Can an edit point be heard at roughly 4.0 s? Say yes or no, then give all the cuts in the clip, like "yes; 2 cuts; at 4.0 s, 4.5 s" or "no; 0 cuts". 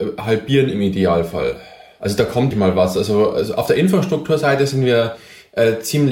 no; 1 cut; at 2.5 s